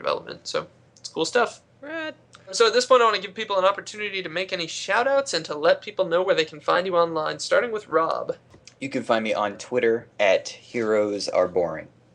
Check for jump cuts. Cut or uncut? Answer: uncut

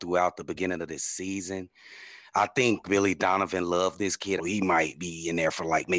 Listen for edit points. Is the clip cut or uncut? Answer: cut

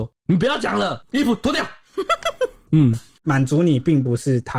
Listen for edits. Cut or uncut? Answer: cut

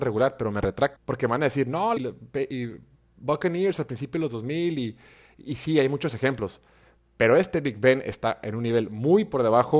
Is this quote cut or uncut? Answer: cut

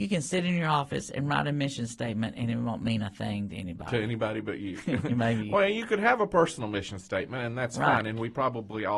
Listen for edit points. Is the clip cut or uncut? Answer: uncut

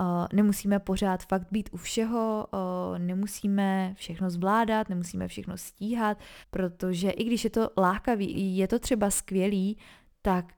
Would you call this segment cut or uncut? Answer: cut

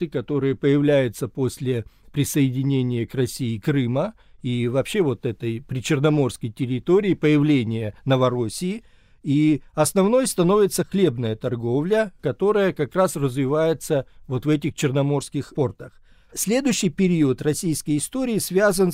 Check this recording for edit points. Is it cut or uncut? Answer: uncut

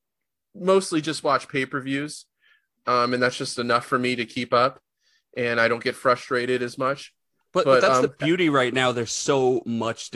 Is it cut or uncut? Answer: uncut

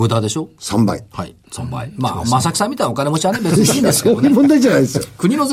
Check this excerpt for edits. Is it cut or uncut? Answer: uncut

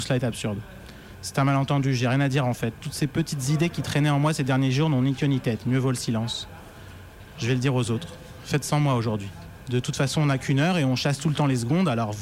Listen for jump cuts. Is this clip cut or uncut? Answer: uncut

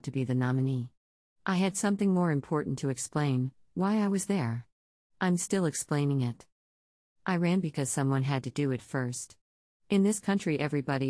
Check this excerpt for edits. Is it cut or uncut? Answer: uncut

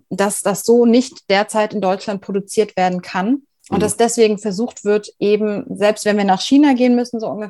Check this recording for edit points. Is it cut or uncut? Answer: uncut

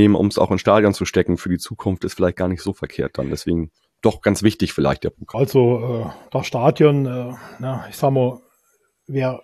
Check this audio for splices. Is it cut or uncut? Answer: cut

